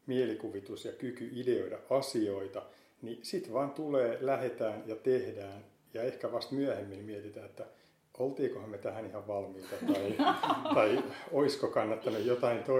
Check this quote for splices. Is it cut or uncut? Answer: uncut